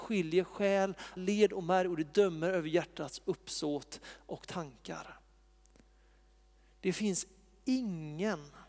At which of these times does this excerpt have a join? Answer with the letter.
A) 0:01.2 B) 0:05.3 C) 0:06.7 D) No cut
A